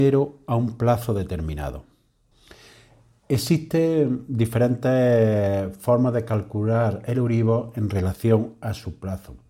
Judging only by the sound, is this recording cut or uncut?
uncut